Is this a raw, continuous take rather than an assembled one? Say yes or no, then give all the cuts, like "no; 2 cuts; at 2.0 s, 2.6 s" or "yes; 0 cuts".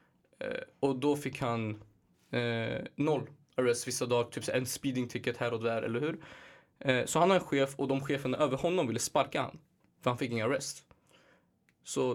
yes; 0 cuts